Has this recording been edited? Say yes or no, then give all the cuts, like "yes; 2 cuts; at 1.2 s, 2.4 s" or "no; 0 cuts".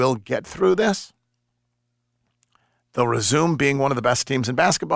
no; 0 cuts